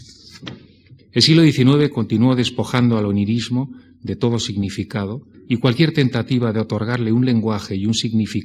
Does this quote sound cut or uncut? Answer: cut